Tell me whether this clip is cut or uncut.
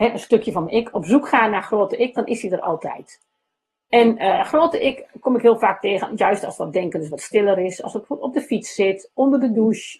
uncut